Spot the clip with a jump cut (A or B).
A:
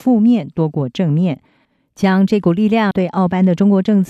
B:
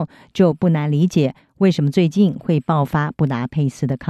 A